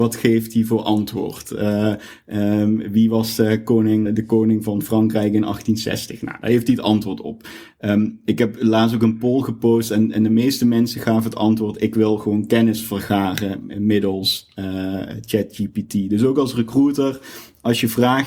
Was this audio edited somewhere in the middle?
yes; 1 cut; at 4.0 s

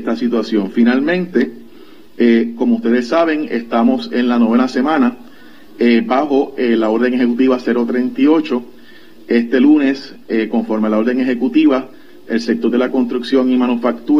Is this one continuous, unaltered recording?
yes; 0 cuts

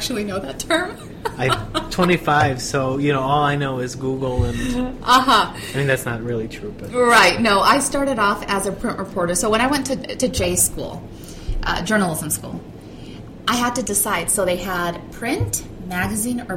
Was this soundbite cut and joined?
no; 0 cuts

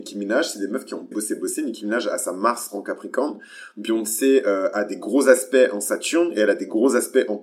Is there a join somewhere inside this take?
yes; 1 cut; at 1.1 s

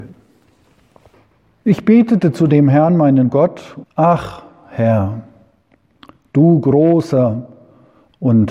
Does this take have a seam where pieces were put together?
yes; 1 cut; at 3.8 s

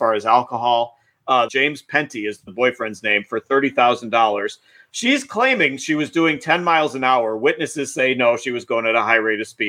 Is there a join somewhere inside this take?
yes; 1 cut; at 1.5 s

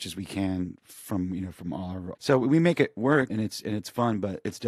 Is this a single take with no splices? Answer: no; 2 cuts; at 2.1 s, 3.3 s

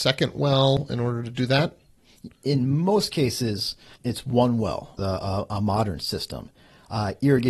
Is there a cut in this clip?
yes; 2 cuts; at 4.0 s, 5.0 s

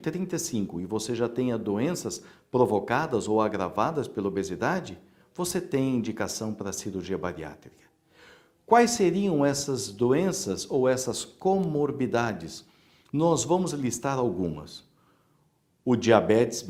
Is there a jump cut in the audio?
yes; 1 cut; at 13.1 s

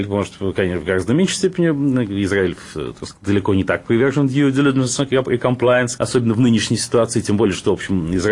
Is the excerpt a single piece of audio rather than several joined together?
no; 1 cut; at 6.0 s

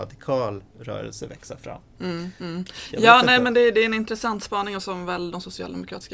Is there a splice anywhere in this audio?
no; 0 cuts

